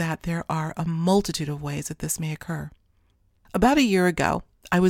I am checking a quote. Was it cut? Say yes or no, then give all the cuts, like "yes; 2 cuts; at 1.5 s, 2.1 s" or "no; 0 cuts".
no; 0 cuts